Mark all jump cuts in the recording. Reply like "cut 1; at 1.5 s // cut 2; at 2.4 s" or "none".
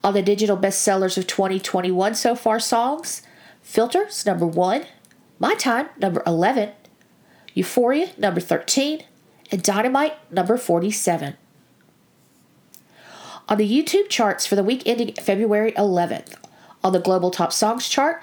none